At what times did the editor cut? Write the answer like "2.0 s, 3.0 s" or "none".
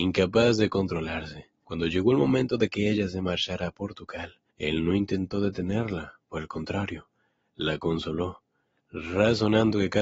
1.6 s, 4.5 s